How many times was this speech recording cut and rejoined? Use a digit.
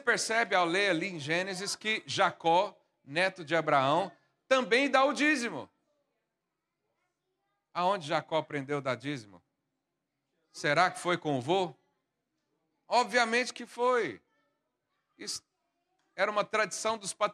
0